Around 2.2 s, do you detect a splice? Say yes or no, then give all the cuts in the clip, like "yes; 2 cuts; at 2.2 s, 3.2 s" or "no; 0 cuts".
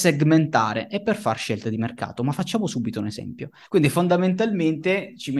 no; 1 cut; at 3.7 s